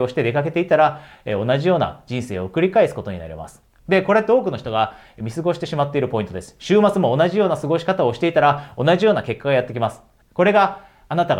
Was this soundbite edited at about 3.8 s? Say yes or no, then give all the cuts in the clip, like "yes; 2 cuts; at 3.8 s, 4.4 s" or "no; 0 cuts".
yes; 2 cuts; at 3.8 s, 10.2 s